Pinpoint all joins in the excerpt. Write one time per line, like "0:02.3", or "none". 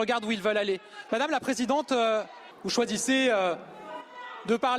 0:01.1
0:02.5